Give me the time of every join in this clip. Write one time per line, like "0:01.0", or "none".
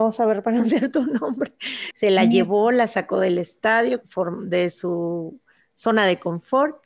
0:01.9
0:04.0